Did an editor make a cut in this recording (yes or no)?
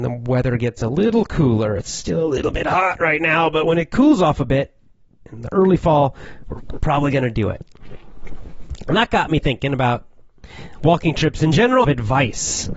yes